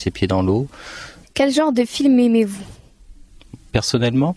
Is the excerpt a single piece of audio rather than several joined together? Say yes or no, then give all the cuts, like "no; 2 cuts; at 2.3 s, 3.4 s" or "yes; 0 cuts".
no; 1 cut; at 1.2 s